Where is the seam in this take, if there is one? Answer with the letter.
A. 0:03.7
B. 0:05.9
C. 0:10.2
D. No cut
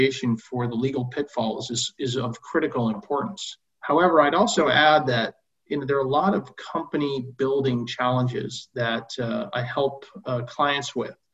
A